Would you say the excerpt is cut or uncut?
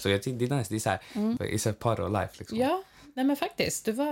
cut